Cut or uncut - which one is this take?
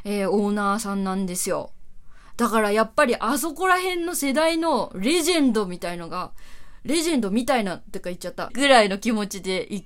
cut